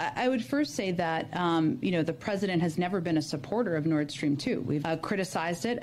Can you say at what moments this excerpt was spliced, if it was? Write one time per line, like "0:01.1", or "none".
0:04.8